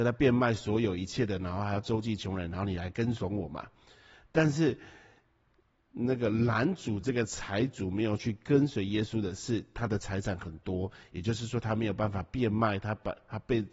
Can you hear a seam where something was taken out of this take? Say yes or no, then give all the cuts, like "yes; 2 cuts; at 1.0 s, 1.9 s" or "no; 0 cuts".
no; 0 cuts